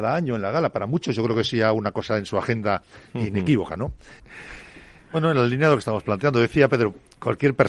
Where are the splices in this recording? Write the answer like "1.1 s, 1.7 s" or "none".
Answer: 4.2 s

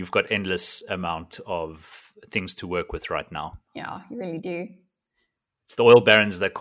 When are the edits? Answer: none

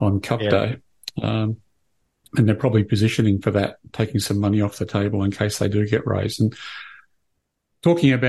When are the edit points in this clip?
none

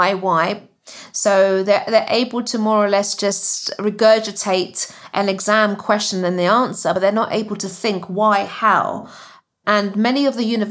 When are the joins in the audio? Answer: none

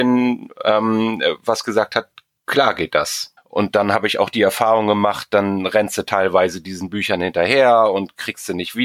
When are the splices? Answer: 3.4 s

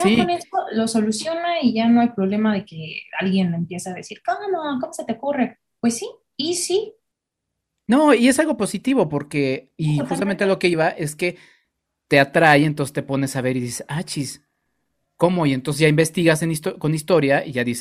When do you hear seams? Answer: none

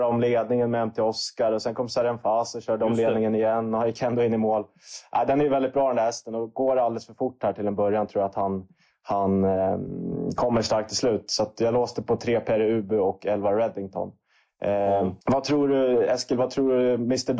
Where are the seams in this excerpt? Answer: 15.2 s

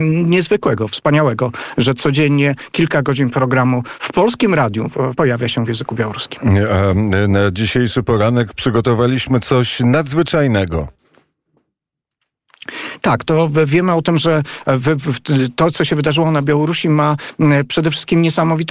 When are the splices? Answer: 5.1 s

